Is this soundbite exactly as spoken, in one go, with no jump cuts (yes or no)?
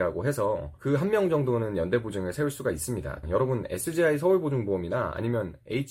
no